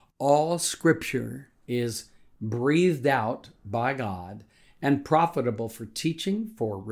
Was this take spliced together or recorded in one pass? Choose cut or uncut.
uncut